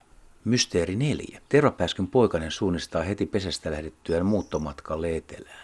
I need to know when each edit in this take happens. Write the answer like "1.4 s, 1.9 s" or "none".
1.5 s